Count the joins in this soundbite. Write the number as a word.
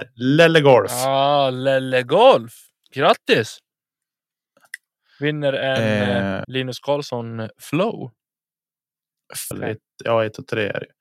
two